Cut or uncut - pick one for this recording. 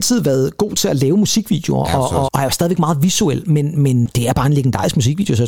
cut